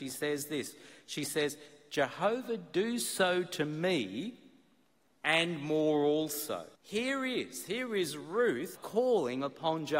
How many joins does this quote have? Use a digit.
2